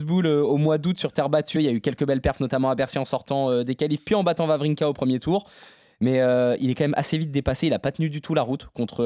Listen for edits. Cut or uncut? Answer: cut